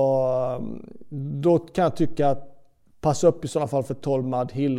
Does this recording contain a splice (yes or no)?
no